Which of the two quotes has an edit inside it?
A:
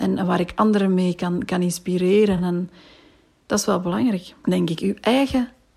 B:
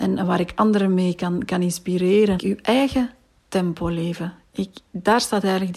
B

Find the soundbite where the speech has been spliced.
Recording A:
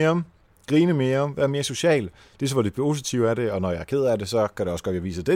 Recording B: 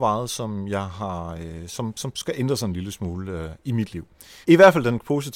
B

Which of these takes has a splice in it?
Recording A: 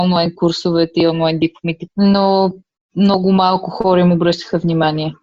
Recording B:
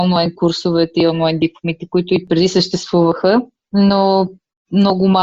A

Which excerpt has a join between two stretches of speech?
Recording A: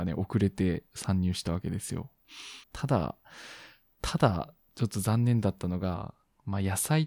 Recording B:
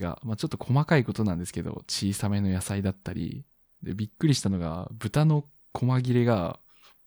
A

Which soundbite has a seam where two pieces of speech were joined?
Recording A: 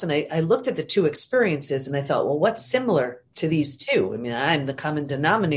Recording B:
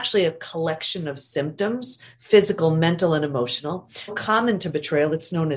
B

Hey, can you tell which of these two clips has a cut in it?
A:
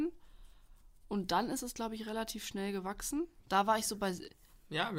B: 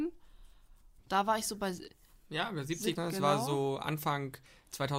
B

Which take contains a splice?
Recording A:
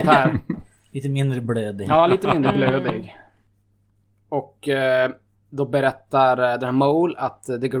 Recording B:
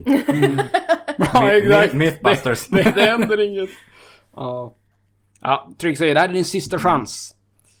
B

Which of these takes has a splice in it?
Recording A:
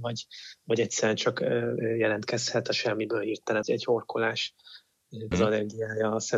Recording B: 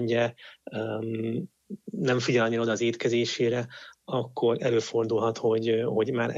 A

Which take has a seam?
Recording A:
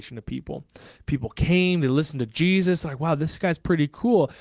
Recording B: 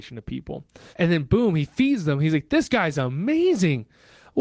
B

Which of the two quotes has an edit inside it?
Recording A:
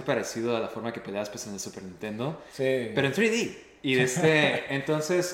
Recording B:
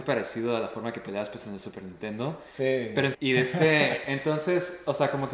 B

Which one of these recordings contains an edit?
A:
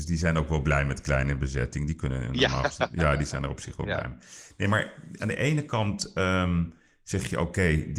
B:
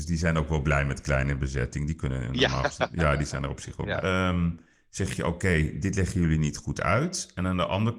B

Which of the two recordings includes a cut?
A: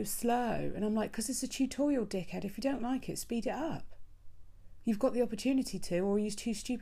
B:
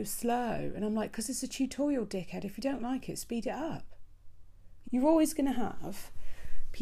B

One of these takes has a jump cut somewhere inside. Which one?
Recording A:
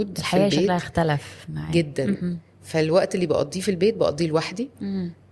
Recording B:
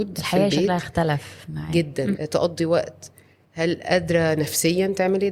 B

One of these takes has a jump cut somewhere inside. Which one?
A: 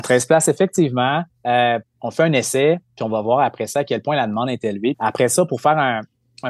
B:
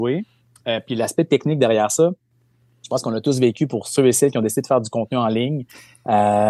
A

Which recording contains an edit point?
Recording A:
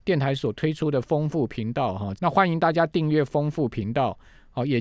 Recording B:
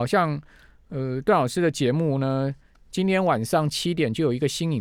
A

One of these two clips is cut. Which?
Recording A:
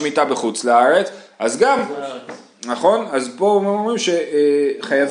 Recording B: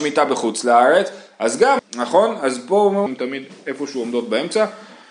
B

